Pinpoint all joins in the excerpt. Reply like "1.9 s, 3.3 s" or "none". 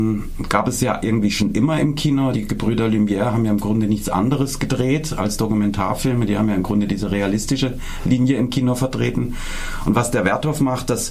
none